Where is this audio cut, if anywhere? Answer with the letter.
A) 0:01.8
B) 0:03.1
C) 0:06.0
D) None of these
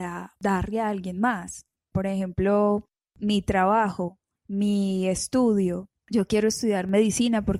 D